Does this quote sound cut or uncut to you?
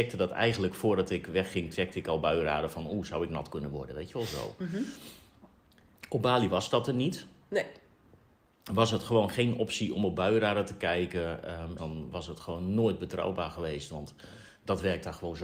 cut